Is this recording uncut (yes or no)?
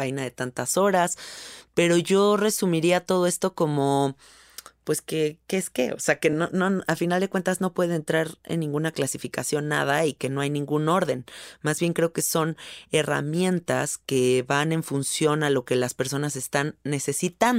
yes